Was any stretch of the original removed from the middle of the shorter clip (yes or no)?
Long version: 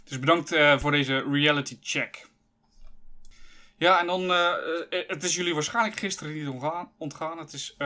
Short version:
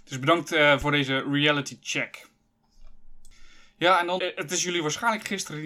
yes